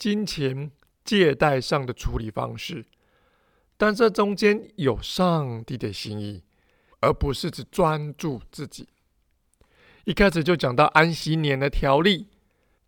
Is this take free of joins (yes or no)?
no